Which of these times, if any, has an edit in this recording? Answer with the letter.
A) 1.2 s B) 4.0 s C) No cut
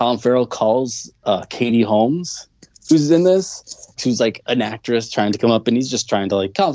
B